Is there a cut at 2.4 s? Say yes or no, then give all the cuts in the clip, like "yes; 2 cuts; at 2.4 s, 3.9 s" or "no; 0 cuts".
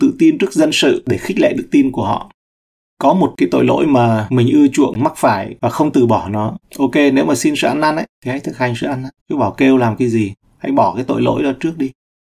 no; 2 cuts; at 6.6 s, 9.2 s